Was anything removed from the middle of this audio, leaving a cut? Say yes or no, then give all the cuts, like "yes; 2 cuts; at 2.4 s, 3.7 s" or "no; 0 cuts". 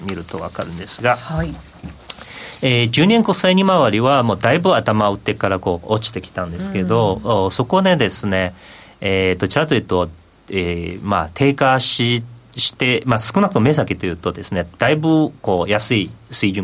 no; 0 cuts